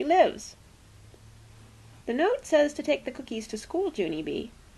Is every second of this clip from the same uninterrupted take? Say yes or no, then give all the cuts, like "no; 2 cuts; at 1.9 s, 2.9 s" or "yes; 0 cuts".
no; 1 cut; at 2.0 s